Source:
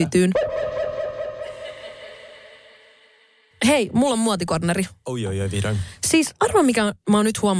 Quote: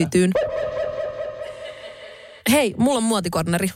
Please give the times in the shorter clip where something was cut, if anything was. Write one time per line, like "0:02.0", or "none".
0:02.4